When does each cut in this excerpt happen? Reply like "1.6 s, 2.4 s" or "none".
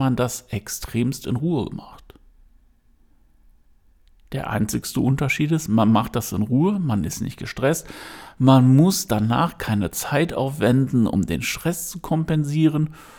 none